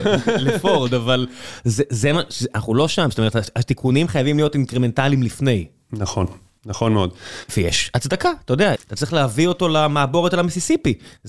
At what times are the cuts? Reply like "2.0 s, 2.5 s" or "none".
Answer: 7.5 s, 8.8 s